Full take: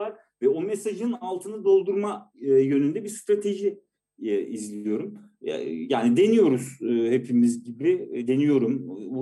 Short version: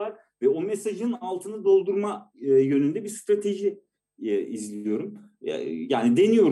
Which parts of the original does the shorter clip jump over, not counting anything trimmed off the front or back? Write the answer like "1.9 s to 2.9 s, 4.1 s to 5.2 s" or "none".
none